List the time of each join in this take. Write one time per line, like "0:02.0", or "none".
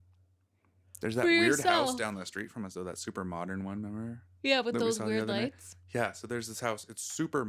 none